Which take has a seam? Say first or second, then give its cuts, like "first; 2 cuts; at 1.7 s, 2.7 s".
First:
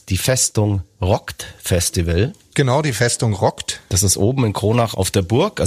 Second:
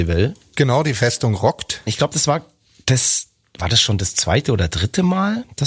second; 1 cut; at 1.9 s